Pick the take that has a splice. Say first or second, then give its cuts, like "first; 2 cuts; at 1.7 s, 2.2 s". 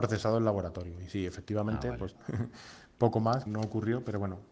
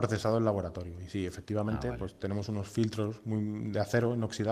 first; 2 cuts; at 2.1 s, 3.5 s